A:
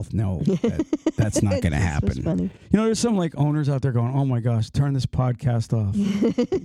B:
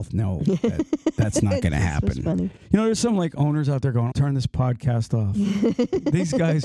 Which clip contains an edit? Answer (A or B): B